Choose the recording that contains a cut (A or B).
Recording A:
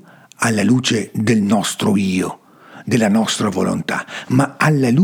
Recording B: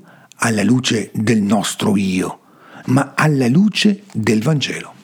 B